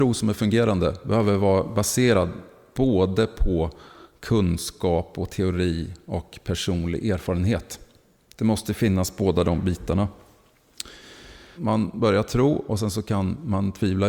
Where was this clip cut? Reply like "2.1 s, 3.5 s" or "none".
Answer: 11.6 s